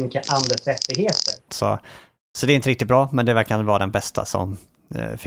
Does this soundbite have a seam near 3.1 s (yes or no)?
no